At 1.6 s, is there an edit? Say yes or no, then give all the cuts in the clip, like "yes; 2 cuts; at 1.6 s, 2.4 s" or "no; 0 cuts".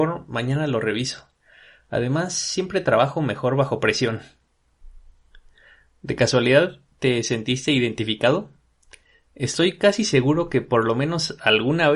no; 0 cuts